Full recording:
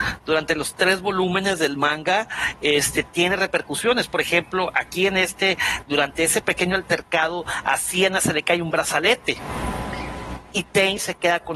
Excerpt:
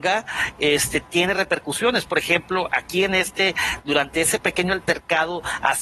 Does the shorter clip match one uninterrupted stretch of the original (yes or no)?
yes